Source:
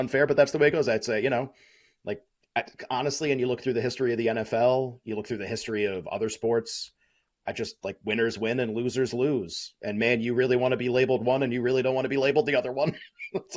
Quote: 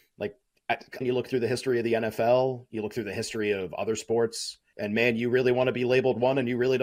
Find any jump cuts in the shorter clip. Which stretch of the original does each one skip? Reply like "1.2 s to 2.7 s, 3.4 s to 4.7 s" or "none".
2.9 s to 3.3 s, 7.1 s to 9.8 s